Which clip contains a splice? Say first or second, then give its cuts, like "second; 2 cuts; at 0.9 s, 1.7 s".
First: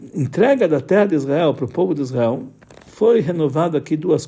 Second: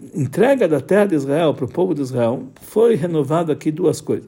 second; 1 cut; at 2.6 s